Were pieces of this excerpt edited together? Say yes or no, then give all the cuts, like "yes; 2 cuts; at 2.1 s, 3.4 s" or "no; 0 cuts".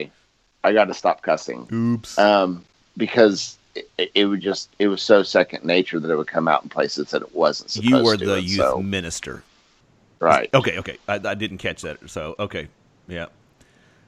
yes; 1 cut; at 3.9 s